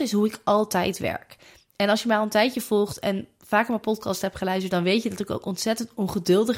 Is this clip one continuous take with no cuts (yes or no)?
yes